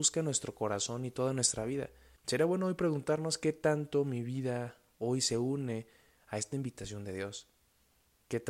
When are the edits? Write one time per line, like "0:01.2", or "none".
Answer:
0:02.2